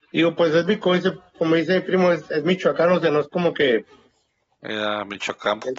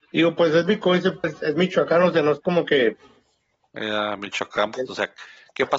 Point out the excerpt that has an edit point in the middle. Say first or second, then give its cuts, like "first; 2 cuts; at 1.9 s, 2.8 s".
second; 2 cuts; at 1.2 s, 4.9 s